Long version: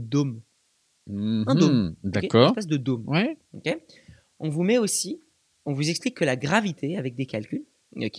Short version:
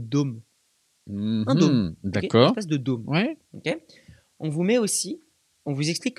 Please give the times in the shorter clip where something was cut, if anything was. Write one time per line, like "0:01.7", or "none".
none